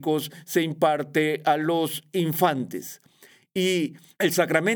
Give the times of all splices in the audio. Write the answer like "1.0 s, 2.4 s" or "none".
none